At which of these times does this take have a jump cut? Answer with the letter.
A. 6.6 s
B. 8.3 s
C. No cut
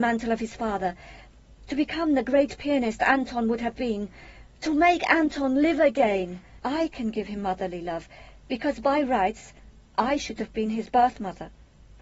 A